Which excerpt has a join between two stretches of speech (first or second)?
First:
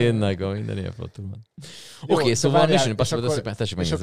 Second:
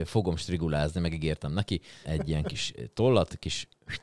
second